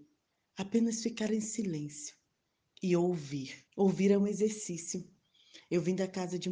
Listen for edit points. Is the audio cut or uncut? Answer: cut